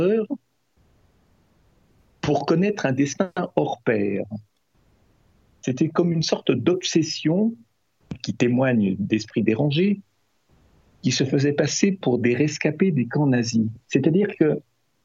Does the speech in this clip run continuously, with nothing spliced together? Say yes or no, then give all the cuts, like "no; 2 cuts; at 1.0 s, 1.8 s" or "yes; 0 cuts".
yes; 0 cuts